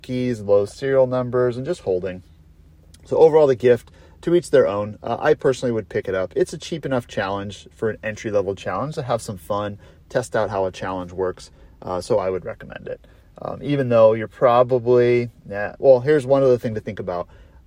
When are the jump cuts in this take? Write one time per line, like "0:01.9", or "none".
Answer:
none